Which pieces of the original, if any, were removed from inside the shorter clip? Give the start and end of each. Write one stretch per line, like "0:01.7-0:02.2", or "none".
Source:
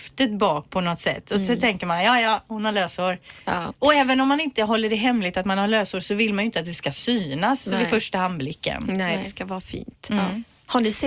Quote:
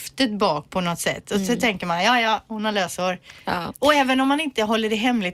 none